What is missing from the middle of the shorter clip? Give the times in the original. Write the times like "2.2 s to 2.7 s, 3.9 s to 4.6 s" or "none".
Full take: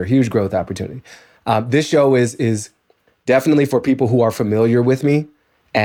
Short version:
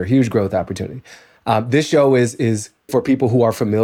2.9 s to 3.7 s

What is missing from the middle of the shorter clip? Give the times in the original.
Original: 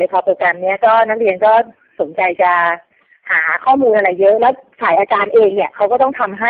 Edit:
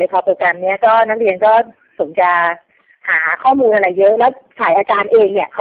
2.1 s to 2.4 s

